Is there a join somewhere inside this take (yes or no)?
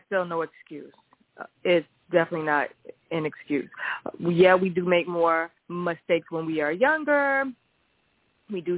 yes